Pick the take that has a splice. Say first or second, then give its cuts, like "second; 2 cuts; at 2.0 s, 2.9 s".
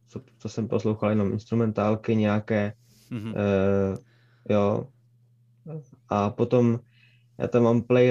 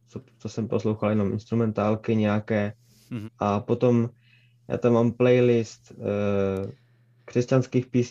second; 1 cut; at 3.2 s